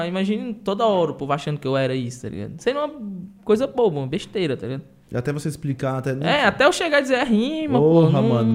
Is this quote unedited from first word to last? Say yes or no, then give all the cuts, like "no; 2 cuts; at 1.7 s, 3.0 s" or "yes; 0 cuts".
yes; 0 cuts